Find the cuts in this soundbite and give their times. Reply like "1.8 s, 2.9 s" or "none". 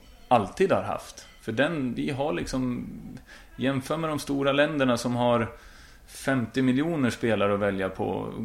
2.0 s